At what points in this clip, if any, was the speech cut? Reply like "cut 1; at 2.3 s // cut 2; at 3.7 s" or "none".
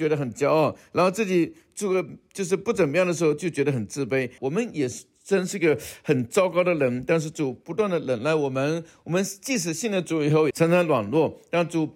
cut 1; at 4.4 s // cut 2; at 10.5 s